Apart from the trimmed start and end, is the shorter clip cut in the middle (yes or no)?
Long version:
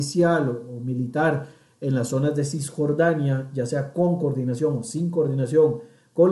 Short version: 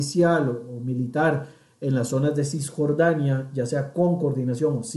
no